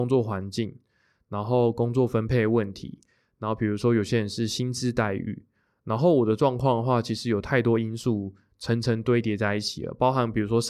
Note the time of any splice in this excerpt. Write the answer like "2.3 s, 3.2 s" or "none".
none